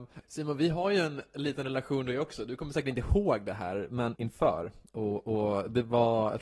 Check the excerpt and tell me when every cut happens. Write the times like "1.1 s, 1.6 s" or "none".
4.2 s